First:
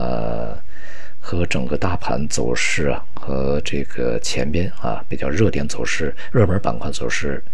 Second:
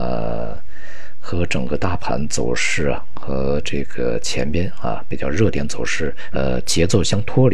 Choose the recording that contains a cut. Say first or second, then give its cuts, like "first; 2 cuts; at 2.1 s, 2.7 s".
second; 1 cut; at 6.3 s